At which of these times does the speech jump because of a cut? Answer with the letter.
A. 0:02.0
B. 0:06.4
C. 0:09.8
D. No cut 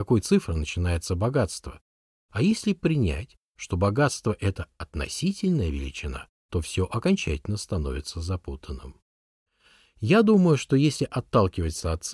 B